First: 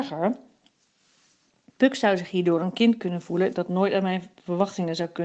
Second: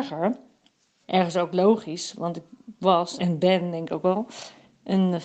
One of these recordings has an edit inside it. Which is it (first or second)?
second